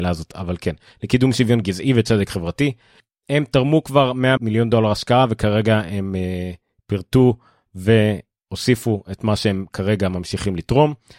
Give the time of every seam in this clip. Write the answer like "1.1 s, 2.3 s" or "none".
4.4 s